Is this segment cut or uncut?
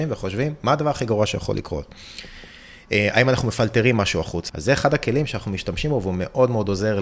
cut